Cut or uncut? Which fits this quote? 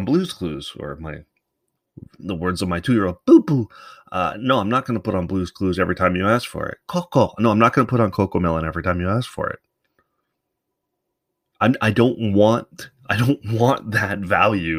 uncut